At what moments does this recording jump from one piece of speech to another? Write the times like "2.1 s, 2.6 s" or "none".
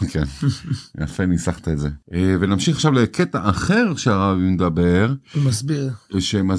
2.0 s